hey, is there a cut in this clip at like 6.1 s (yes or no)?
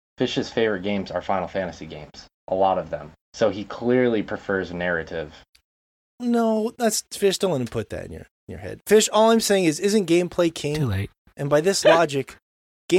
no